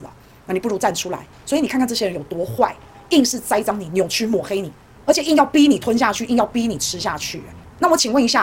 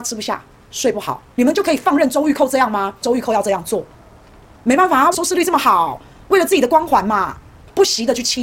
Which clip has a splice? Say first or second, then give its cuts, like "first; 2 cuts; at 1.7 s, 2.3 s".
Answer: second; 3 cuts; at 1.4 s, 3.0 s, 5.1 s